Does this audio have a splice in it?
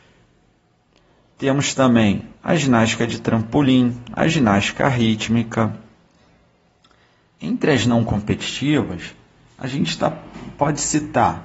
no; 0 cuts

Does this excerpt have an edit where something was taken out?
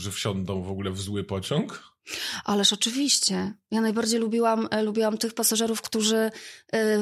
no; 0 cuts

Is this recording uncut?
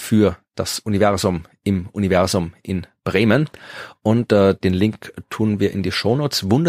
yes; 0 cuts

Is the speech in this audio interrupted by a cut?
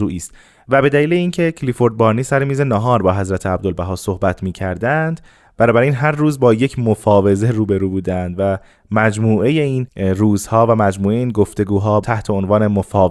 no; 0 cuts

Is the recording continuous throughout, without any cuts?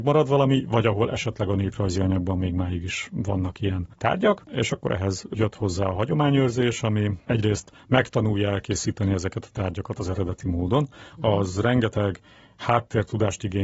yes; 0 cuts

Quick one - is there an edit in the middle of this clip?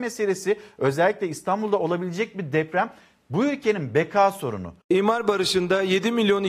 yes; 1 cut; at 4.8 s

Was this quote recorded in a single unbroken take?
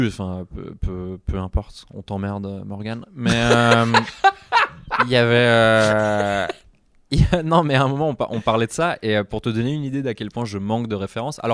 yes; 0 cuts

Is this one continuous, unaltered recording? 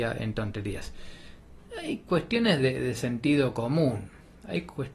yes; 0 cuts

